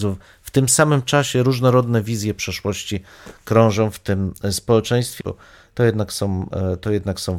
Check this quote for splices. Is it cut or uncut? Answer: cut